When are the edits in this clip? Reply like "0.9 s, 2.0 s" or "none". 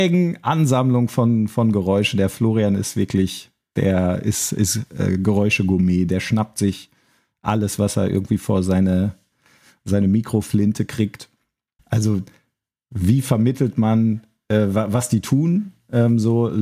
11.8 s